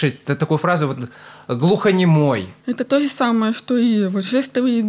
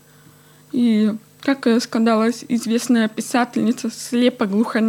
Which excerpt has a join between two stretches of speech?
first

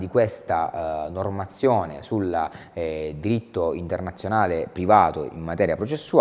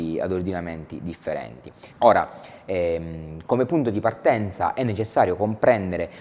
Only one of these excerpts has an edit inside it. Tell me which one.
second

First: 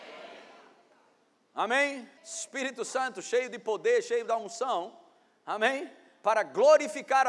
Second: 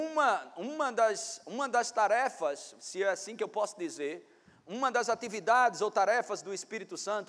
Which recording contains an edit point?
first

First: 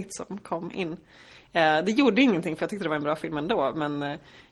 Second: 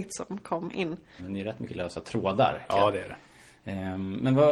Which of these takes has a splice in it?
second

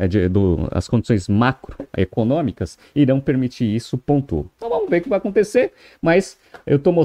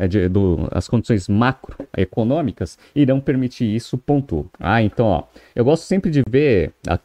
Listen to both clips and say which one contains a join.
second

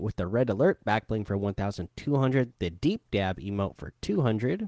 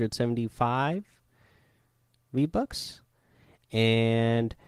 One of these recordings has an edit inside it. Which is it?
first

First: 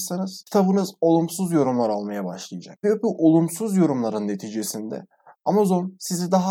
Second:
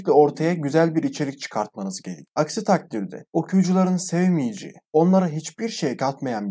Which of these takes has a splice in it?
second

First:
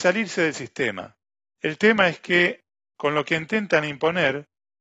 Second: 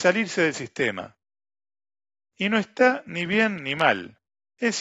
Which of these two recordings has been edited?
first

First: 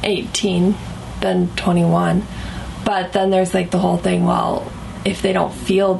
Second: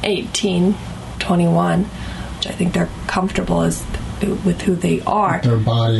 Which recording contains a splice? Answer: second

